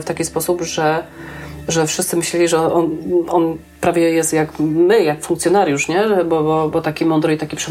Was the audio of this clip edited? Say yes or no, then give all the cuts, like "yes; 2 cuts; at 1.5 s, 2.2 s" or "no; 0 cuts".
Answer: no; 0 cuts